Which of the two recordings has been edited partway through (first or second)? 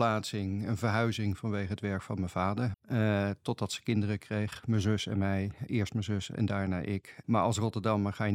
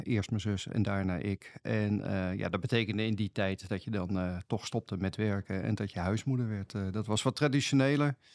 first